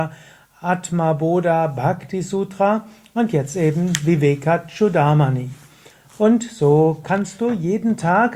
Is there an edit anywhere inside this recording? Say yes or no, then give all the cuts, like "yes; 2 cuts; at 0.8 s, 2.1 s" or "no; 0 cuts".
no; 0 cuts